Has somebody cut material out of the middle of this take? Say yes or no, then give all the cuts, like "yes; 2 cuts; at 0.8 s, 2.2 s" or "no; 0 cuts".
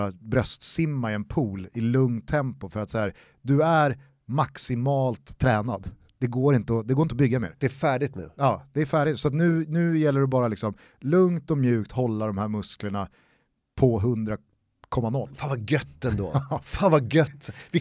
no; 0 cuts